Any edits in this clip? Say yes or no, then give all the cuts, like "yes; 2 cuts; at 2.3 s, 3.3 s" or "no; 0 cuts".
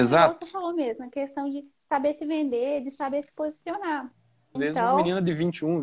yes; 1 cut; at 4.6 s